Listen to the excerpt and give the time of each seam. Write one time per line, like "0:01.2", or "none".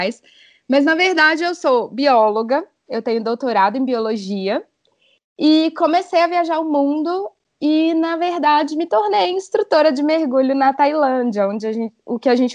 none

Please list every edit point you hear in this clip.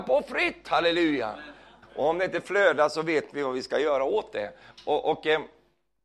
0:01.8

